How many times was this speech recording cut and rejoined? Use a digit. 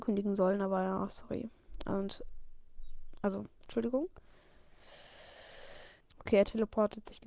2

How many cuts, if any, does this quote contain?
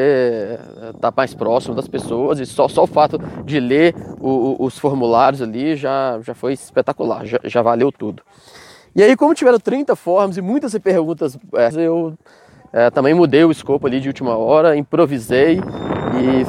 2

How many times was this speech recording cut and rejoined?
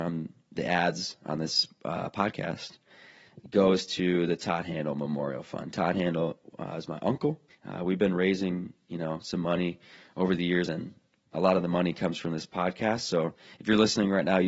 2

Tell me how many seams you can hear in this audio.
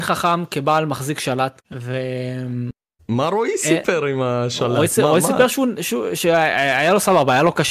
1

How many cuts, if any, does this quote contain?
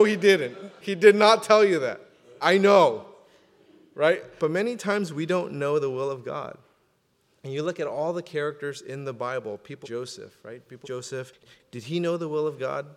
2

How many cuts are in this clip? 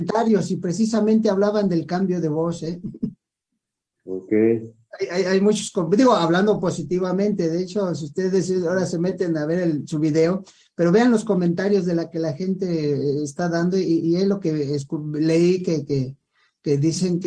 0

